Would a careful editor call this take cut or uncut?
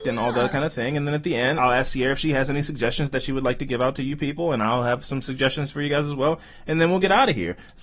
cut